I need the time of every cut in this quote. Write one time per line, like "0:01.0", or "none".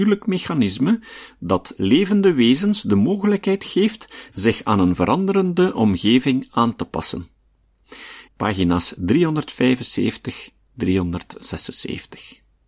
0:08.3